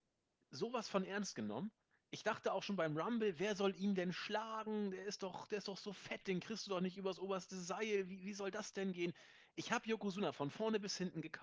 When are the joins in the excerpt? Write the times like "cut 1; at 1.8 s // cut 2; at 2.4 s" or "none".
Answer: none